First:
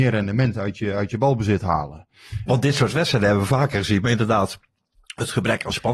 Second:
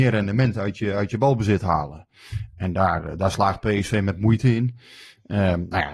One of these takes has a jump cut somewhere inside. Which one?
first; 1 cut; at 2.5 s

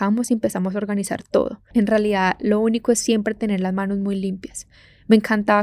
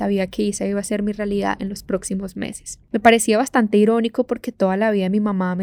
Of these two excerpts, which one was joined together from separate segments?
first; 1 cut; at 1.7 s

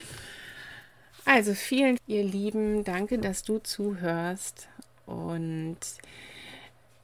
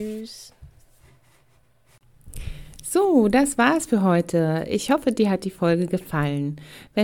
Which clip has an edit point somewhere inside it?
first; 1 cut; at 2.0 s

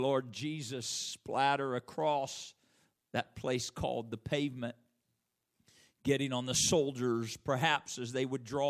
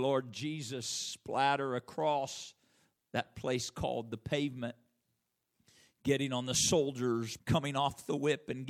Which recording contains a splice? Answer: second; 1 cut; at 7.4 s

